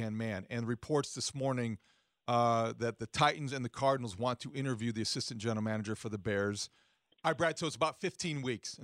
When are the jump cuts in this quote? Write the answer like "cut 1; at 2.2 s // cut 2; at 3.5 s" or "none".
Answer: cut 1; at 7.1 s